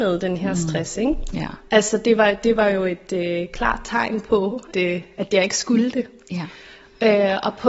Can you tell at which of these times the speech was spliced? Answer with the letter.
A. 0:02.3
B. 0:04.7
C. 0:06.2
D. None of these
B